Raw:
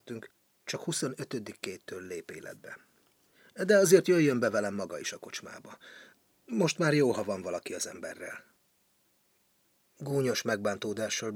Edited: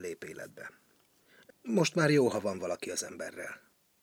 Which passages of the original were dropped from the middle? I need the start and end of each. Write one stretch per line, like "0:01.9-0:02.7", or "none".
0:03.6-0:06.3